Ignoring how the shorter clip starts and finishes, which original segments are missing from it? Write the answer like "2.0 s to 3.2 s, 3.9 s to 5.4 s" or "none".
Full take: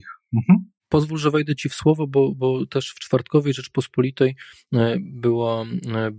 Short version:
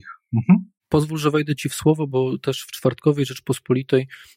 2.1 s to 2.4 s